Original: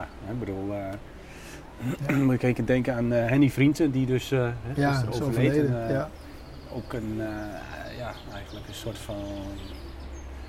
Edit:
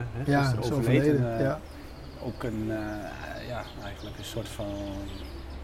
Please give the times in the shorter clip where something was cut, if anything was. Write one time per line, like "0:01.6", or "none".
none